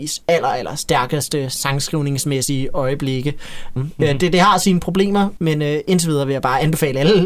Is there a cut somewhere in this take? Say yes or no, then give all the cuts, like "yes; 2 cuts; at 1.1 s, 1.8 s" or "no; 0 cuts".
yes; 2 cuts; at 3.8 s, 5.4 s